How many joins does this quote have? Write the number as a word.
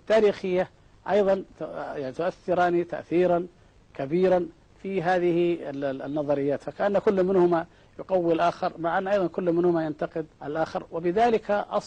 one